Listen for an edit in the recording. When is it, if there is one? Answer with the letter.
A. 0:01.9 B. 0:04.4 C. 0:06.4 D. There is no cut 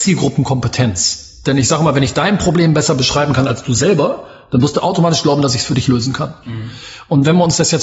C